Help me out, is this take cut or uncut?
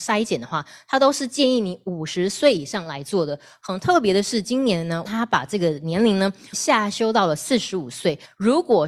uncut